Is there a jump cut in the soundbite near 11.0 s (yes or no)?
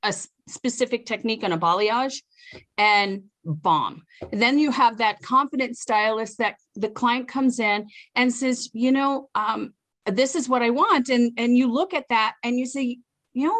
no